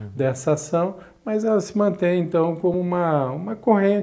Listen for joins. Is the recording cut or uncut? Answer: uncut